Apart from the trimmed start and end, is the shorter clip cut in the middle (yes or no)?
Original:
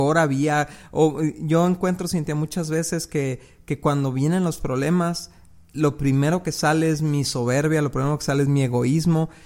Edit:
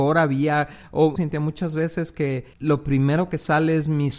yes